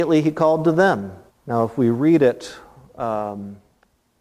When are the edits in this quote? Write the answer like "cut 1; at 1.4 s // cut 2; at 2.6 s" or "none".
cut 1; at 1.3 s

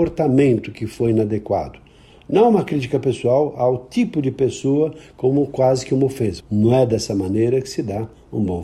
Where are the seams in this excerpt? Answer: cut 1; at 6.4 s

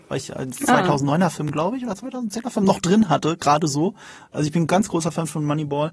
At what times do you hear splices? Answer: none

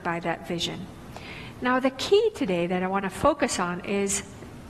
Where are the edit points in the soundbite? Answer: none

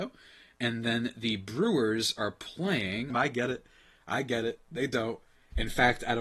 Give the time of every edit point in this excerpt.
cut 1; at 3.1 s

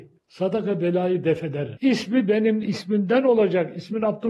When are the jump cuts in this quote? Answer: cut 1; at 1.8 s

